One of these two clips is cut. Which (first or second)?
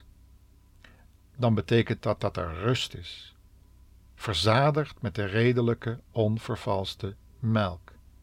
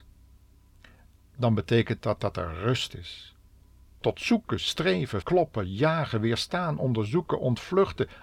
second